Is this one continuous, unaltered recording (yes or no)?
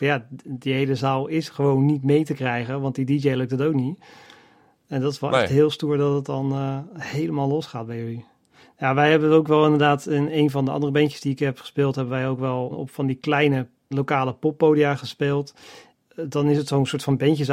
yes